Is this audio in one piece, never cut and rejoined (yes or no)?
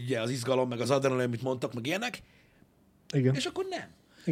no